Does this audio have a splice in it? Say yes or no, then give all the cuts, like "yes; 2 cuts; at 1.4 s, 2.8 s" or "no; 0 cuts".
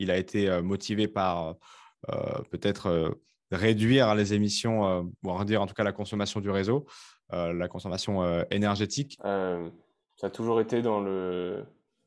yes; 1 cut; at 9.2 s